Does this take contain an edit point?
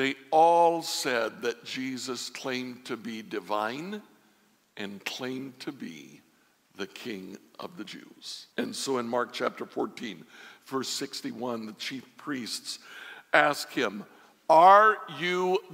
yes; 1 cut; at 8.5 s

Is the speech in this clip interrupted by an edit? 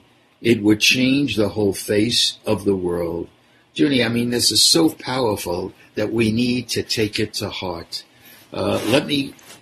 no; 0 cuts

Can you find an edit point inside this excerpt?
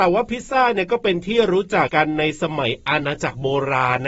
yes; 1 cut; at 1.9 s

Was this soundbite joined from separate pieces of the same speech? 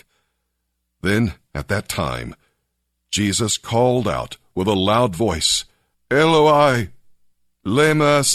yes; 1 cut; at 5.9 s

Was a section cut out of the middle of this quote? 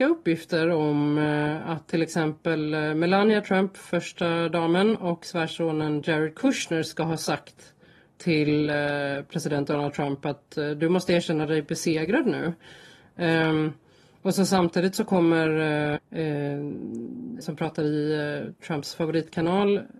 yes; 2 cuts; at 16.0 s, 17.4 s

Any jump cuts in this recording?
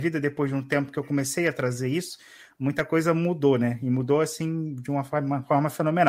no; 0 cuts

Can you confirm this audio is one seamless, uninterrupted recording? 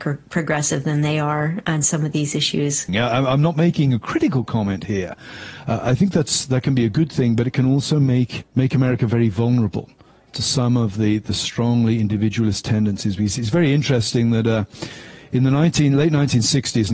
no; 2 cuts; at 2.9 s, 8.5 s

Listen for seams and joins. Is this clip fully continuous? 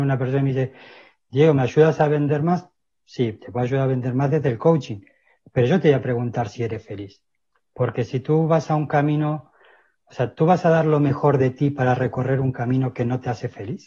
yes; 0 cuts

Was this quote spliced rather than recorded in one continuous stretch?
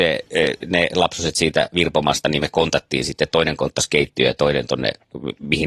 no; 0 cuts

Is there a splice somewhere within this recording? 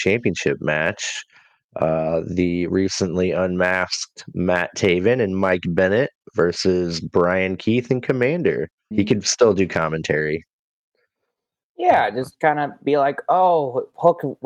yes; 1 cut; at 8.9 s

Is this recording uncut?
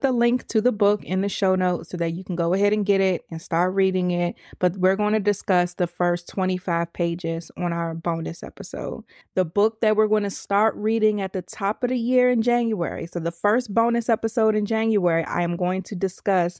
no; 1 cut; at 9.2 s

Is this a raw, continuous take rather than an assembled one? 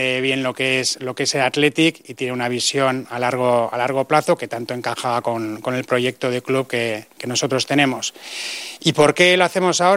yes; 0 cuts

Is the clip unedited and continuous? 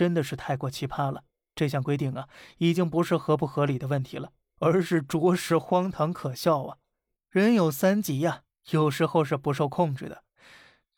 no; 1 cut; at 7.2 s

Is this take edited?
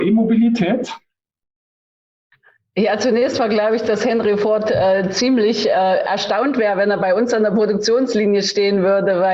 no; 0 cuts

